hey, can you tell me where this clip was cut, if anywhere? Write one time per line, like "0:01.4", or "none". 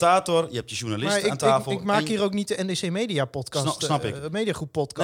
none

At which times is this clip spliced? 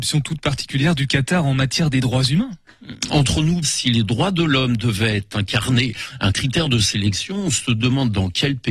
0:03.6

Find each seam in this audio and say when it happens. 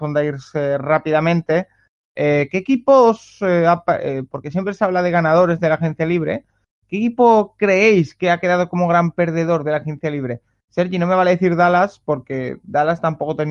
none

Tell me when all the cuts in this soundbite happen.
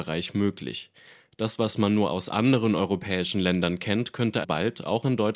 0:04.4

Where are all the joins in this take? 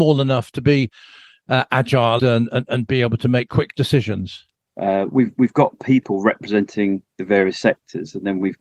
0:02.2
0:04.7

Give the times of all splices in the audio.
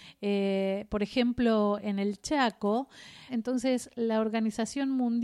0:03.3

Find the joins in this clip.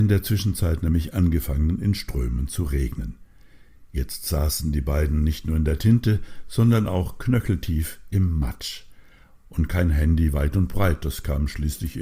none

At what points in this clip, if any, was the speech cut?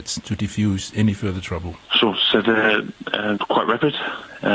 0:01.8
0:03.4

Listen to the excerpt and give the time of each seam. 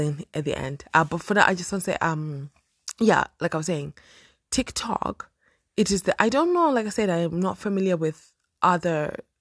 none

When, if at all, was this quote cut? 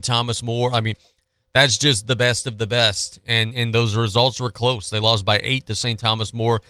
none

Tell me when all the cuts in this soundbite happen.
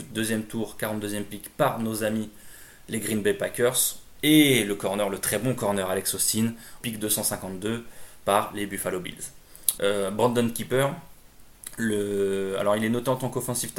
0:04.2
0:06.8
0:09.8

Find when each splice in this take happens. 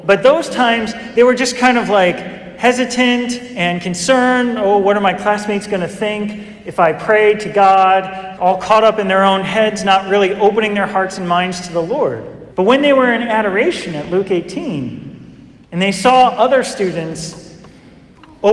0:08.4
0:12.5
0:15.6

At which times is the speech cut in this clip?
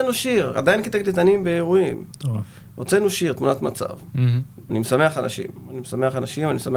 0:04.7

